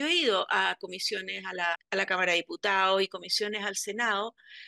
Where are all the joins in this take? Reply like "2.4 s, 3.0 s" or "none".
1.8 s